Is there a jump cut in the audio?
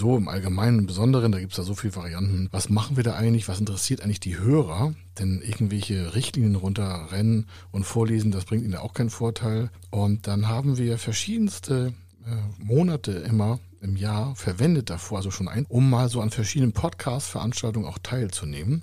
yes; 2 cuts; at 2.5 s, 15.6 s

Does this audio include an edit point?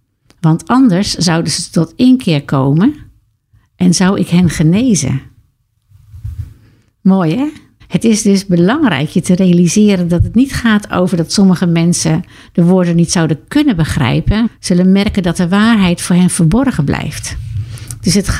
yes; 2 cuts; at 7.8 s, 14.5 s

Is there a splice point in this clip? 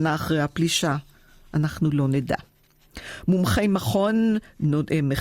no; 0 cuts

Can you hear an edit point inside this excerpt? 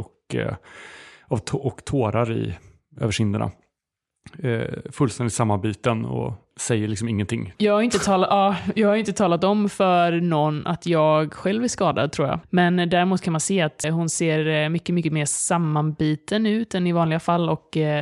yes; 3 cuts; at 7.5 s, 12.4 s, 13.8 s

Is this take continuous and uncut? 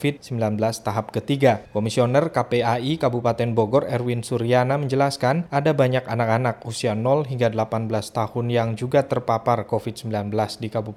yes; 0 cuts

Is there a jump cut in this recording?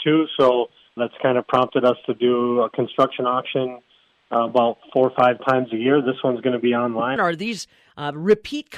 yes; 2 cuts; at 1.0 s, 7.2 s

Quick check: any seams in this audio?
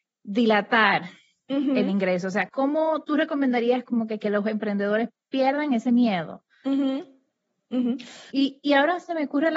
yes; 2 cuts; at 2.5 s, 8.3 s

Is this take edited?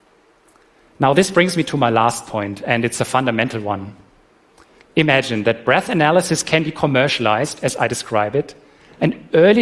yes; 1 cut; at 4.8 s

